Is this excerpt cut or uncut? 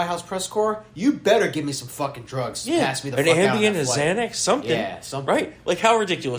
uncut